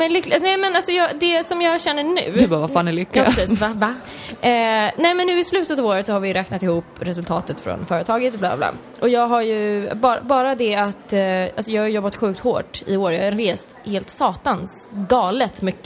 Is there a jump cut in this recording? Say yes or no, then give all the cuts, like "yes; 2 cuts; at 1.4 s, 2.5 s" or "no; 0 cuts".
no; 0 cuts